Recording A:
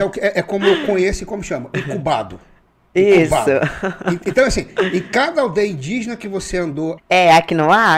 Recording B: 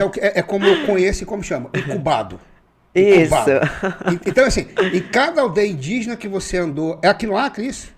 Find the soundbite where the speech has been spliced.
A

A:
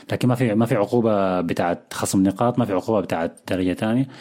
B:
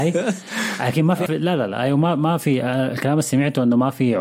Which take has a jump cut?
B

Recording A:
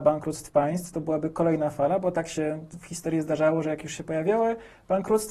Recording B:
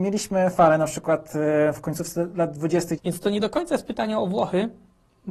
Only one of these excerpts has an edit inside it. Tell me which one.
B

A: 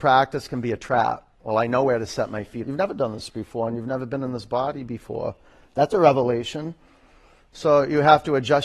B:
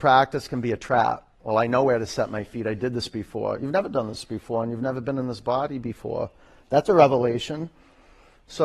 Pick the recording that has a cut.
A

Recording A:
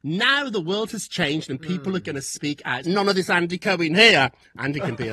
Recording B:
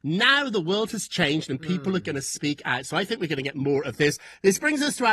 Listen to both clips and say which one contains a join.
A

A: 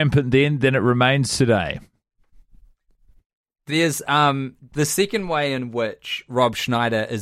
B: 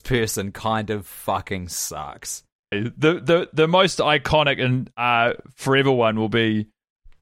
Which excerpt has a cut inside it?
B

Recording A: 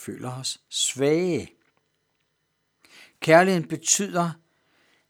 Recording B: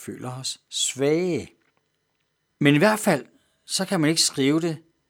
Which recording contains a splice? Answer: B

